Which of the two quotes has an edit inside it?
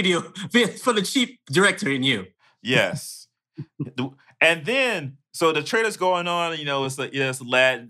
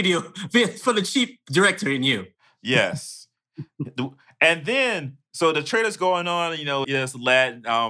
second; 1 cut; at 6.8 s

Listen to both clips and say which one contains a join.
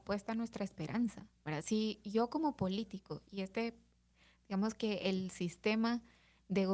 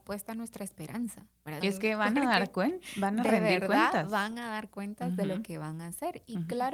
second; 1 cut; at 1.6 s

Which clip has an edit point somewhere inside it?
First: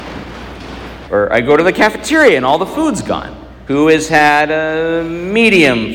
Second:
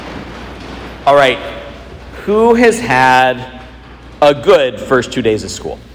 first; 2 cuts; at 1.1 s, 3.7 s

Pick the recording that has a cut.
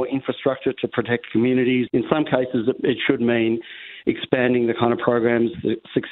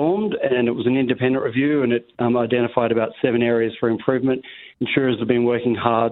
first; 1 cut; at 1.9 s

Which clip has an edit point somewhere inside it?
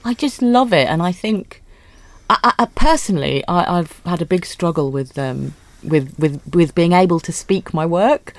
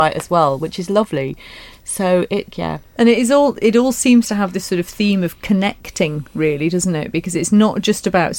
second; 1 cut; at 2.5 s

